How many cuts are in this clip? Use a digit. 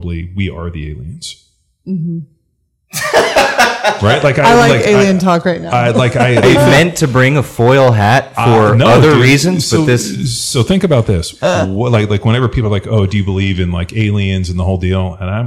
1